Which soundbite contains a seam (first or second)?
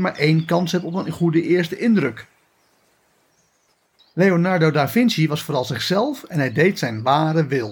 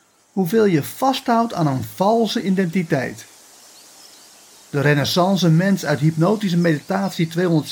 first